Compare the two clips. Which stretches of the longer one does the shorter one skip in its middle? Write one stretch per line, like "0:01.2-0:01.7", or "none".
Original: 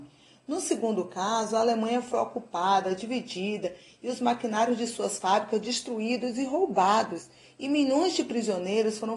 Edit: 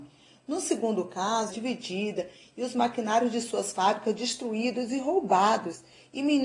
0:01.5-0:03.0